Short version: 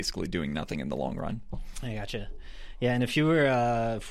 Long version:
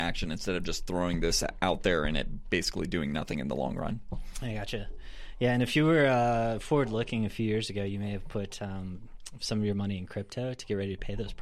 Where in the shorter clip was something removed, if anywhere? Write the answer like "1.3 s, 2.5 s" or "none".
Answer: none